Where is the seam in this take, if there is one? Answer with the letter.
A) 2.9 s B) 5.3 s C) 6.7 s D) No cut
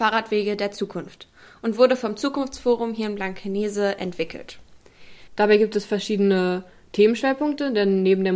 B